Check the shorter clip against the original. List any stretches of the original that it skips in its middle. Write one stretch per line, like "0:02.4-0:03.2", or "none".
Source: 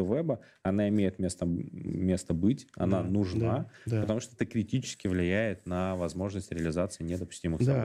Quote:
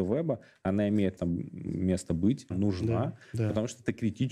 0:01.2-0:01.4
0:02.7-0:03.0